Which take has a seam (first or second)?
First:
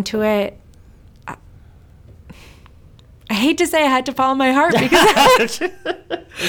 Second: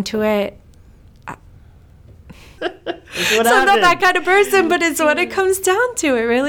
second